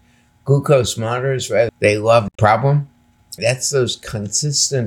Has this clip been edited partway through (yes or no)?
yes